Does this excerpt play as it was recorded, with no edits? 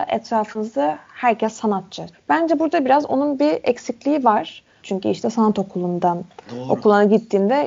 no; 2 cuts; at 2.1 s, 4.8 s

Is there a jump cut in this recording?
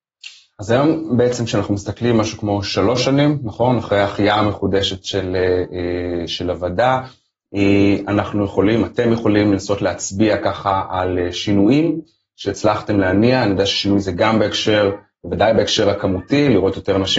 no; 0 cuts

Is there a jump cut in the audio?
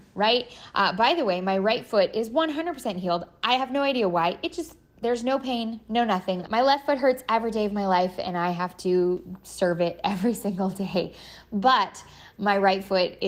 yes; 1 cut; at 6.5 s

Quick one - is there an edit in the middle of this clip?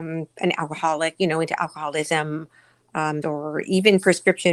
yes; 1 cut; at 3.2 s

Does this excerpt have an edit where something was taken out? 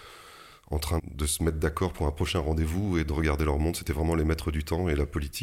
yes; 1 cut; at 1.0 s

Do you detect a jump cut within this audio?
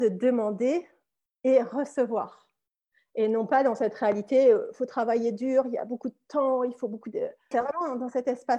yes; 1 cut; at 7.5 s

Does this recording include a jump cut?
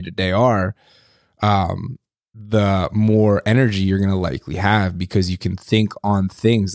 no; 0 cuts

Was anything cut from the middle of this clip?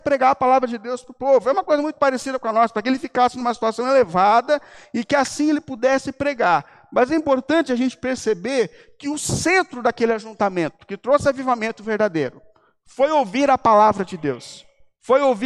no; 0 cuts

